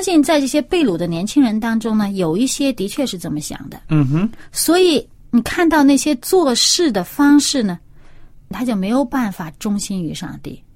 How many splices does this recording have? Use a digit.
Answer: 1